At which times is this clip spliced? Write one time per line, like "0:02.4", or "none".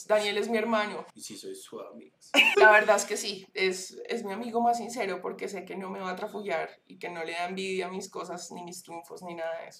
0:01.1
0:02.5